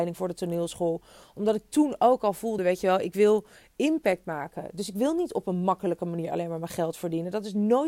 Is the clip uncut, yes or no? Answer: yes